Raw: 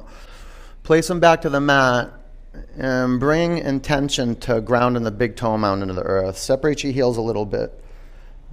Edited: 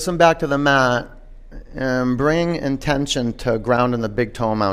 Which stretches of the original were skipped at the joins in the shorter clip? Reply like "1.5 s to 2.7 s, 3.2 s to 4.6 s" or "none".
none